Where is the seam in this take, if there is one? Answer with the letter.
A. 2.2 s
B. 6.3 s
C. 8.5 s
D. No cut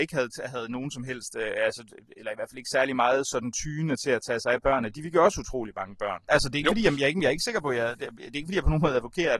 B